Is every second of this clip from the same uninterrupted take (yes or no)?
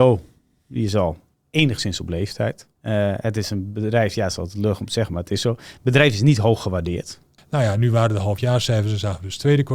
no